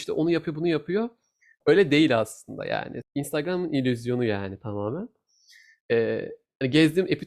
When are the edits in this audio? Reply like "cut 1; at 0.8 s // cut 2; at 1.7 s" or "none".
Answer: cut 1; at 3.0 s